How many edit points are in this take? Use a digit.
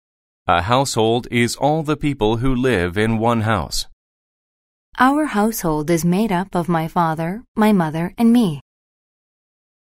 0